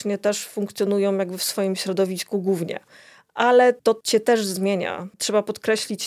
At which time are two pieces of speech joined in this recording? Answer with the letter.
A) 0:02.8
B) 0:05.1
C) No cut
C